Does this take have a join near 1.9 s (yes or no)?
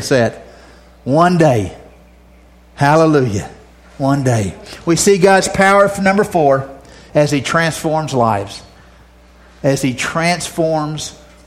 no